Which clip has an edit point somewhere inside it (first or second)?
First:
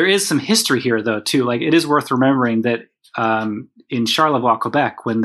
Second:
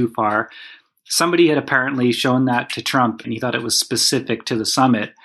second